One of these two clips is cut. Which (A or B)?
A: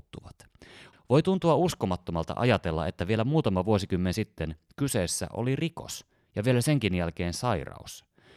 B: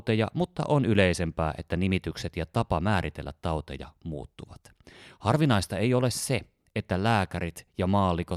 A